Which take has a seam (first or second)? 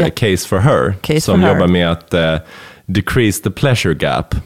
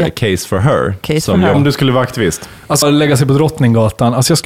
second